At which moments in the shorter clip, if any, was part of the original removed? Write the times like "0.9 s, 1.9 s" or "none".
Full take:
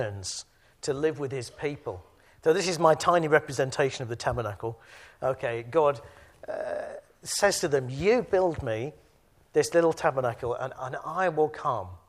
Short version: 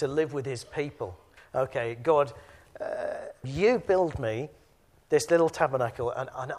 1.4 s, 3.4 s